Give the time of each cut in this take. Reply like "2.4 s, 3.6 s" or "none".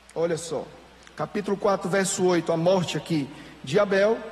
none